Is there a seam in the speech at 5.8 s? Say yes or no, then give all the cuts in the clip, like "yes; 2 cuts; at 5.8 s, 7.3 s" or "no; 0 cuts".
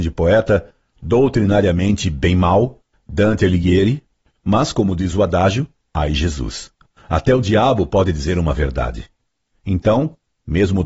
yes; 1 cut; at 5.8 s